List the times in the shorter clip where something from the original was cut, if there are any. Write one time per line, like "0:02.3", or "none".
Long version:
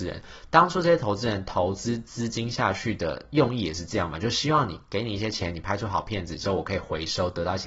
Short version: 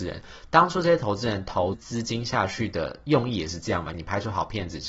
0:01.7
0:03.9